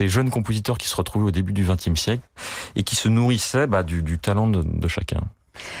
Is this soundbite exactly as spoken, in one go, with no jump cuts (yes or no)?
yes